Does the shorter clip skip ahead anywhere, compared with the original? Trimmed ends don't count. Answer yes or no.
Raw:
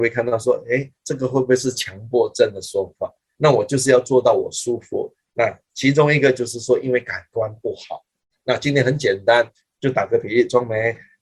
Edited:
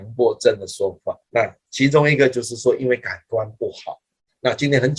yes